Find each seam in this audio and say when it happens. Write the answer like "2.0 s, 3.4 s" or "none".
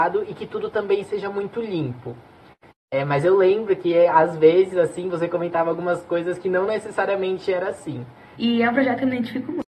8.4 s